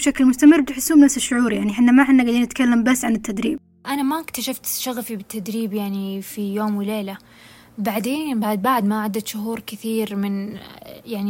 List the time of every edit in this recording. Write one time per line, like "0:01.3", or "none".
none